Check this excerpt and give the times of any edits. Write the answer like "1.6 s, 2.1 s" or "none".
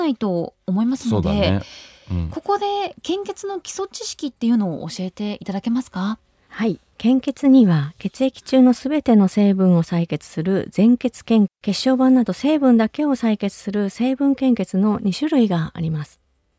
11.5 s